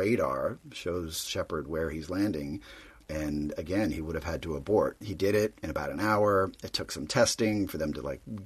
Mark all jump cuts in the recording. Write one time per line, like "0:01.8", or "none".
0:03.0
0:05.0